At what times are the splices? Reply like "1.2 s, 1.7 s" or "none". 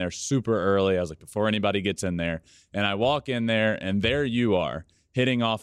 none